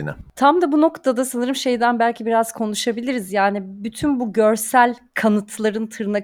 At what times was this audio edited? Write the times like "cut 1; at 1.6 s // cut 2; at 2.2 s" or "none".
none